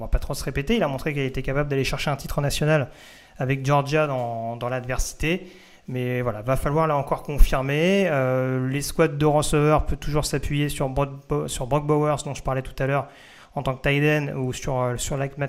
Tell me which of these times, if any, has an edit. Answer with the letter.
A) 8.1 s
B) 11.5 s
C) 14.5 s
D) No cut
D